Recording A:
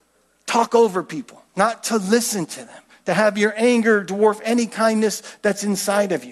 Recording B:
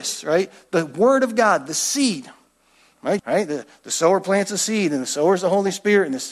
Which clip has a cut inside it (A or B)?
B